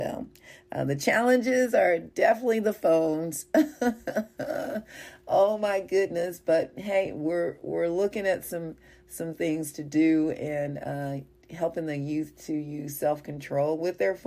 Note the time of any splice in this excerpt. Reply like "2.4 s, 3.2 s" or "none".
none